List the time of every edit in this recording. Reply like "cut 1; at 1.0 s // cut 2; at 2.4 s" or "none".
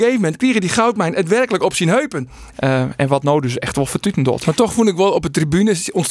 cut 1; at 2.5 s